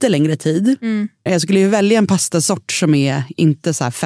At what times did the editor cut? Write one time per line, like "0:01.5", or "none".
0:01.3